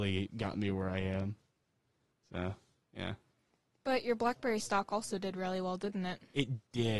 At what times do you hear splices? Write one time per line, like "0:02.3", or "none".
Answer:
none